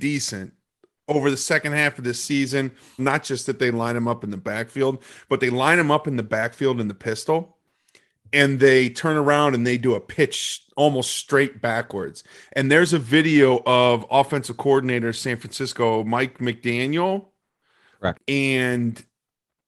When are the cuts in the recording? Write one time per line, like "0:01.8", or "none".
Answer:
0:03.0
0:18.1